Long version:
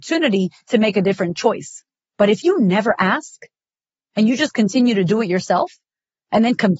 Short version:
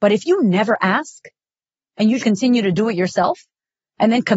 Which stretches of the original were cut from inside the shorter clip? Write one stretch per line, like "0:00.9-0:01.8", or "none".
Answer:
0:04.4-0:04.5